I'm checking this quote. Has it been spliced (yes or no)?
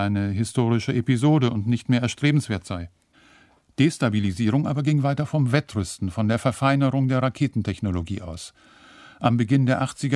no